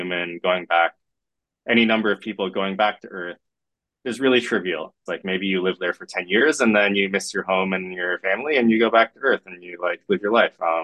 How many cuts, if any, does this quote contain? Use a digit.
1